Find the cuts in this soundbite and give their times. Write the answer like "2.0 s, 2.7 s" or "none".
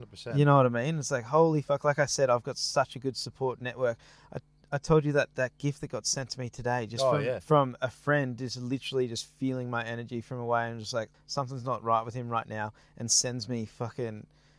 11.1 s